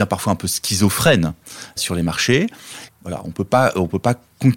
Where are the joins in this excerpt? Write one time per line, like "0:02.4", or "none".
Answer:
0:01.8
0:02.9